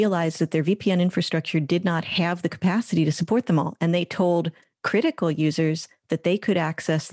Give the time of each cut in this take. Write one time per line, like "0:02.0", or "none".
none